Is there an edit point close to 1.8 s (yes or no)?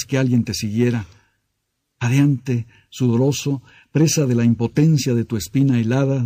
no